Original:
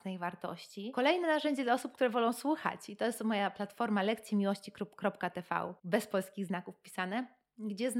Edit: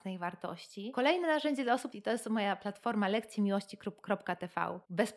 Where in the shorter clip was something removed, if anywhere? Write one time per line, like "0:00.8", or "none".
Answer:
0:01.9